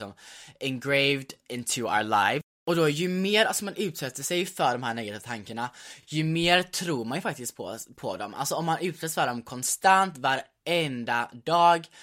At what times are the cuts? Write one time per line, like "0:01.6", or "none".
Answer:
none